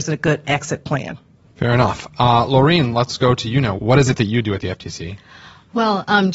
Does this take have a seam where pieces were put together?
no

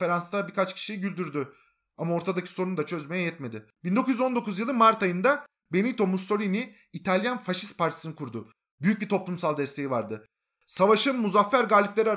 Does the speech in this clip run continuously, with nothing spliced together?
no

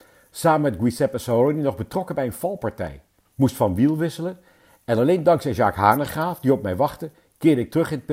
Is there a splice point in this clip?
no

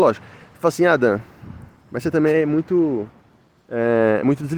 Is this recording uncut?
yes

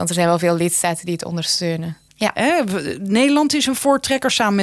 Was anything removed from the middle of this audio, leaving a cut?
yes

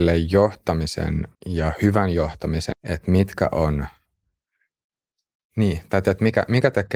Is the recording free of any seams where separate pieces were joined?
no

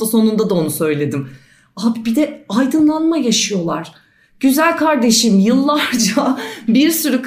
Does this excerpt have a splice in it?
no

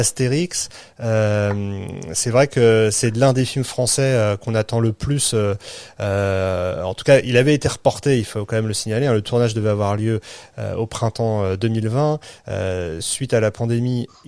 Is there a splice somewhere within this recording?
no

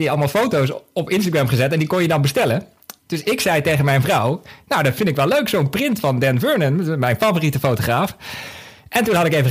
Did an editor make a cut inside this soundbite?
no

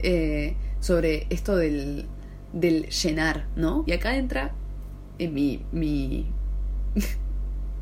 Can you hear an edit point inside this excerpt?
yes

